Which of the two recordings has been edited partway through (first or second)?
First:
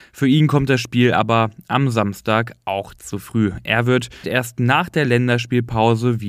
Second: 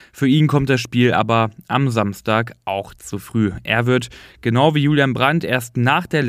first